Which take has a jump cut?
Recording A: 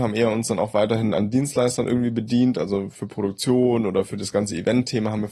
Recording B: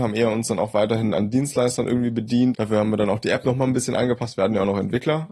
B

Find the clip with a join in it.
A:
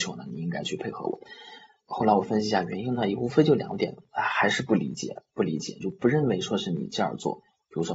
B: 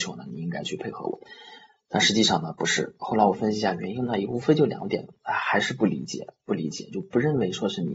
A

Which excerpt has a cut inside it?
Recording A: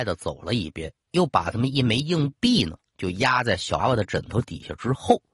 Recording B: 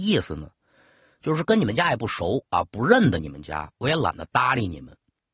A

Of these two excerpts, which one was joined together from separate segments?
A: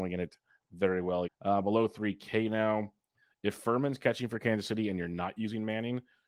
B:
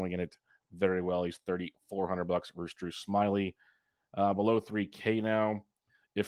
A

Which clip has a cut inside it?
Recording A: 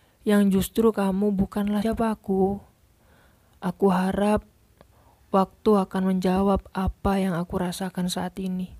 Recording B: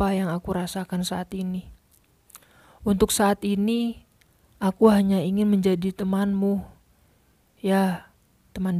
A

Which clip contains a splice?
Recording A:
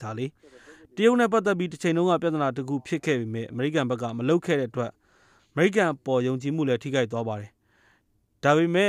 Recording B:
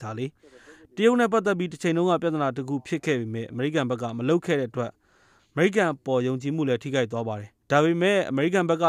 B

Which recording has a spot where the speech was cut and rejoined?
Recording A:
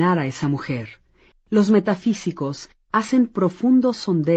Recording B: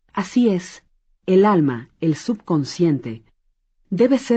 A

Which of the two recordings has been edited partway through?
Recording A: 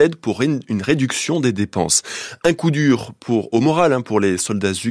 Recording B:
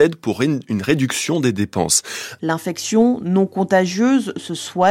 B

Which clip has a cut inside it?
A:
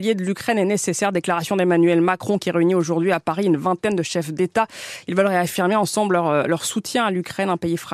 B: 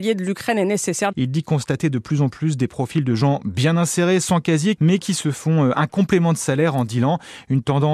B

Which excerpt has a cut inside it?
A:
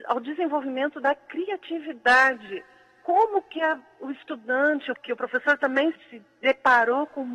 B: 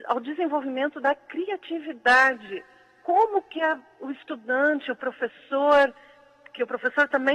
A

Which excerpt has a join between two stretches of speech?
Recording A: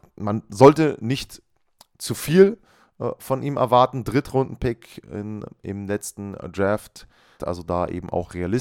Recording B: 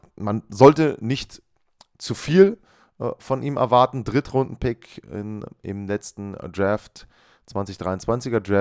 A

